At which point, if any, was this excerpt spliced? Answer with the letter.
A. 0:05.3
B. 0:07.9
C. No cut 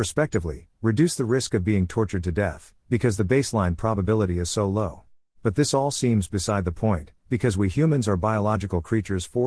A